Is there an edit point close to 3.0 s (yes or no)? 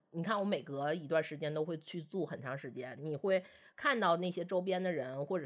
no